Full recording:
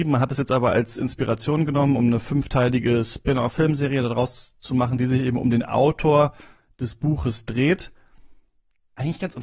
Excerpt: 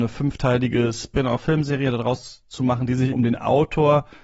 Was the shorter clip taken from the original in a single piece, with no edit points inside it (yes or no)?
no